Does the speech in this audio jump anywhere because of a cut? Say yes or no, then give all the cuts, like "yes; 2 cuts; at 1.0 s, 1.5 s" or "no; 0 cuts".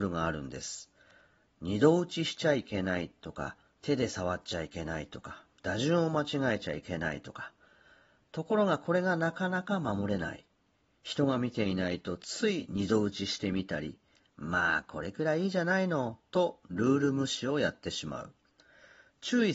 no; 0 cuts